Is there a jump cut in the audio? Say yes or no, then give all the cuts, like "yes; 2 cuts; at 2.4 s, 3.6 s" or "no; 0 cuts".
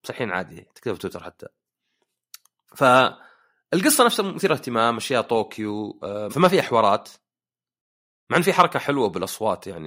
yes; 1 cut; at 6.3 s